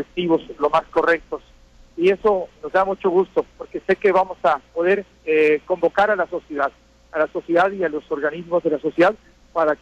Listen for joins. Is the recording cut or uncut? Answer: cut